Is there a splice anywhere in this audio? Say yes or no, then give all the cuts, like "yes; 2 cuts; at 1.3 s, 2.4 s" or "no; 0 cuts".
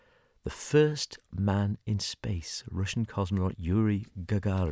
no; 0 cuts